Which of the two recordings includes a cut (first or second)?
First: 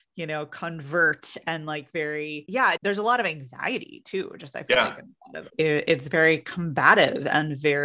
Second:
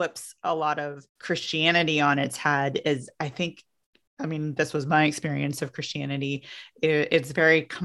first